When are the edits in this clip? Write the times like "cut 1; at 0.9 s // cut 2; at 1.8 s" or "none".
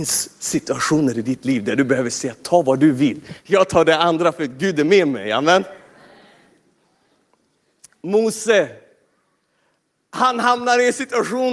none

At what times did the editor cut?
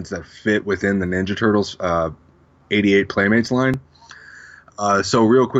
none

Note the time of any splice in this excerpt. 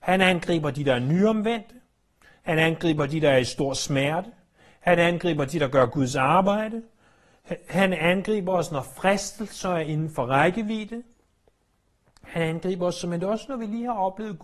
none

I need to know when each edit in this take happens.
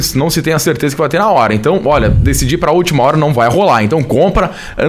none

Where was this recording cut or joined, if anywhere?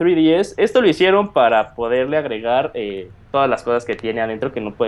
none

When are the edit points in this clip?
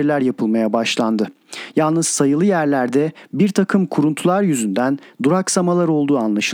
none

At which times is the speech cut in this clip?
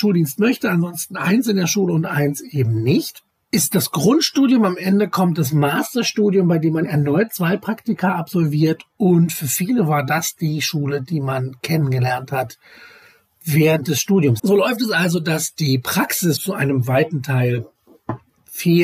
cut 1; at 14.4 s // cut 2; at 16.4 s

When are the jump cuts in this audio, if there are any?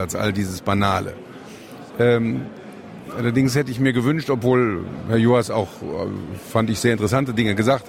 cut 1; at 1.9 s

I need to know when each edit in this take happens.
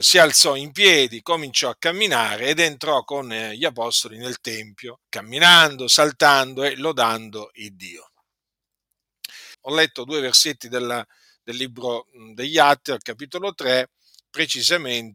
cut 1; at 5.0 s // cut 2; at 9.5 s

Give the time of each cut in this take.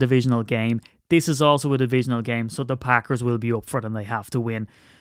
none

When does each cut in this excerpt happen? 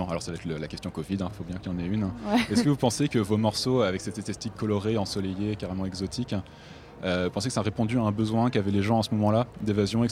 none

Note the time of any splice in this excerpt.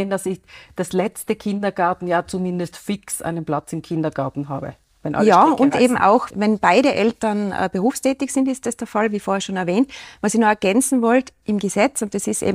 cut 1; at 6.3 s

